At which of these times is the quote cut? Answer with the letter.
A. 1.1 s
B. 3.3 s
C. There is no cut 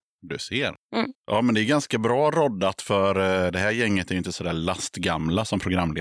A